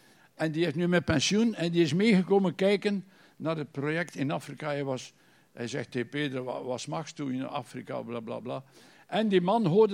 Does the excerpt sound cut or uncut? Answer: uncut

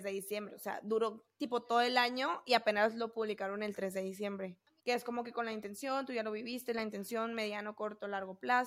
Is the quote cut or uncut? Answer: cut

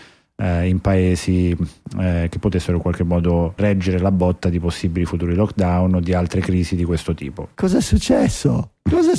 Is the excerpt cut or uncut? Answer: cut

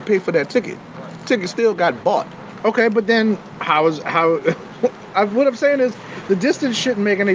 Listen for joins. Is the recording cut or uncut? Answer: uncut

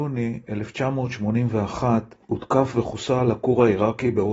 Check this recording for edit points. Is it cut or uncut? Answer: cut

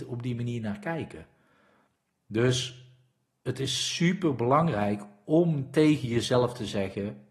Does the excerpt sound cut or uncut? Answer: uncut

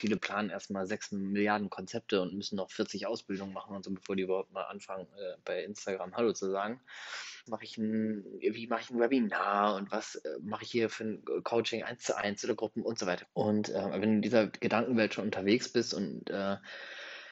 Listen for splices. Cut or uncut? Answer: cut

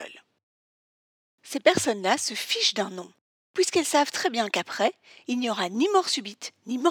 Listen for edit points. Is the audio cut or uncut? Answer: uncut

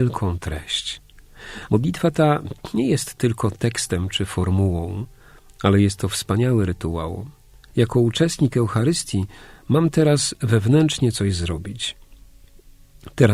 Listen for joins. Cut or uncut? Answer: cut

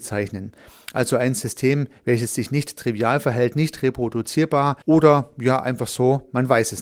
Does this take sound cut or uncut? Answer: cut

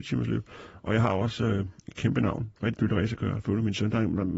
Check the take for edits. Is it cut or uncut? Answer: uncut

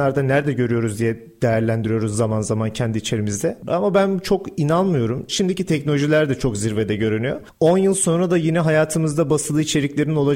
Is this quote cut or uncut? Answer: cut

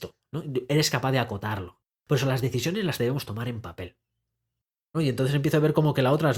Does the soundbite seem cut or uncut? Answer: cut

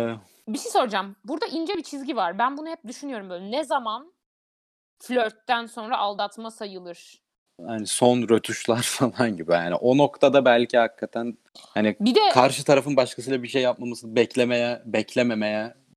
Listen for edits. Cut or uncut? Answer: cut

